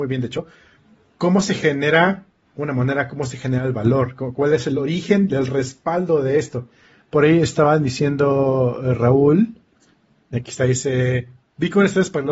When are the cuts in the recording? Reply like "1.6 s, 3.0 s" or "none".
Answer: none